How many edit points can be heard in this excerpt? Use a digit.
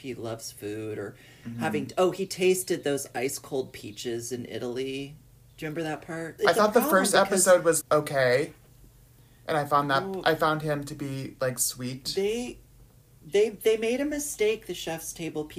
2